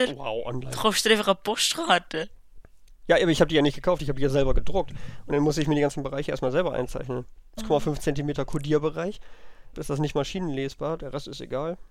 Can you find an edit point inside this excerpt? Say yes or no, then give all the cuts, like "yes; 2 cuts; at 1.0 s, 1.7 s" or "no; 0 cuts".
yes; 3 cuts; at 7.6 s, 9.7 s, 11.0 s